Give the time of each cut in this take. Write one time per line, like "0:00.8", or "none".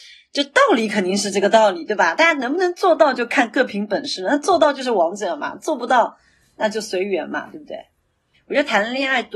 0:08.3